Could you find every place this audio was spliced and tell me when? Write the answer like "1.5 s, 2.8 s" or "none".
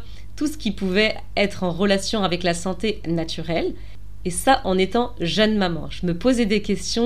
4.2 s